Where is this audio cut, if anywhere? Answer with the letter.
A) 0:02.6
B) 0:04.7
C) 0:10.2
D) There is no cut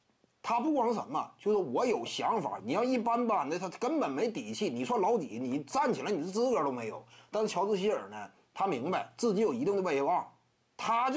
A